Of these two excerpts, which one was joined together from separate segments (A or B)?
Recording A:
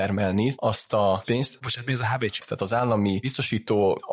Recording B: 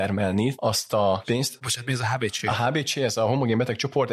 A